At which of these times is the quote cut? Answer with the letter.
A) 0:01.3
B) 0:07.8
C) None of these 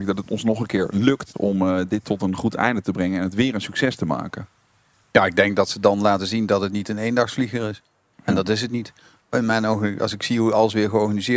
A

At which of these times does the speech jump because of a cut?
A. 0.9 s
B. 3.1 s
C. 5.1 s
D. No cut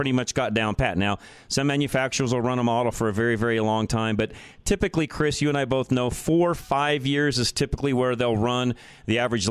D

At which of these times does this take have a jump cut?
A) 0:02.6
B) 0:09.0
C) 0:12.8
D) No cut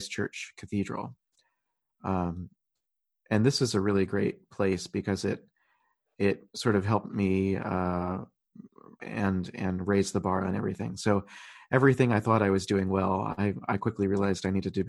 B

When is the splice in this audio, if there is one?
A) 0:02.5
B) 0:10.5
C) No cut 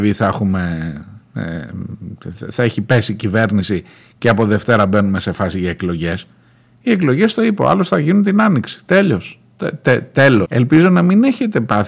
B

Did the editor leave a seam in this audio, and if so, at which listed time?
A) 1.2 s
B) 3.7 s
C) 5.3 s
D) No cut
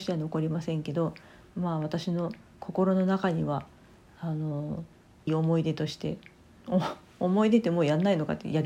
C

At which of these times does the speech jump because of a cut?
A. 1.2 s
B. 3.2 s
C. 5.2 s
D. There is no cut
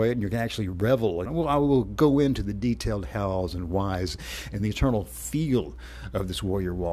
A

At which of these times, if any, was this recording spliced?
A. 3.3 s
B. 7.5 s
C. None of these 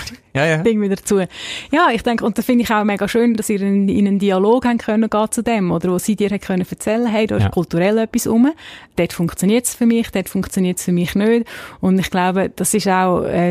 C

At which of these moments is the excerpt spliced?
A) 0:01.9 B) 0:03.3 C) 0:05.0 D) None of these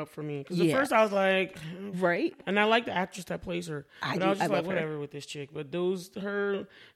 A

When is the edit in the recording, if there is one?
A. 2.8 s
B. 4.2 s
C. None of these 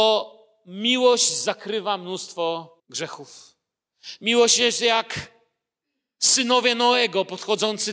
A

